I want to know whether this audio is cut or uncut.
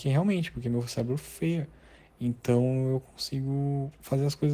uncut